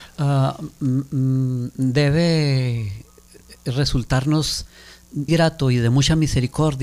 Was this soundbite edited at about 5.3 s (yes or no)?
yes